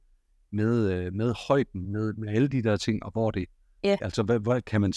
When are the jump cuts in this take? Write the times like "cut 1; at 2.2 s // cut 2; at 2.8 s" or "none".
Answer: cut 1; at 1.8 s // cut 2; at 4.0 s